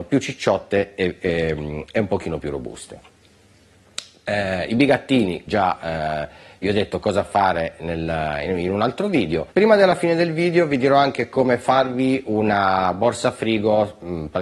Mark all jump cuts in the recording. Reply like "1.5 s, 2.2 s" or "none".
5.5 s, 9.5 s